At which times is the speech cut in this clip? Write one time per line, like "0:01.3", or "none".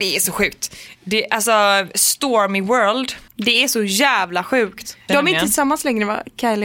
0:03.3
0:05.1